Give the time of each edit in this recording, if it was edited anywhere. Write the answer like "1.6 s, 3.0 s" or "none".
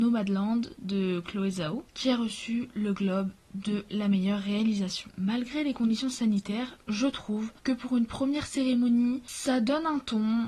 7.6 s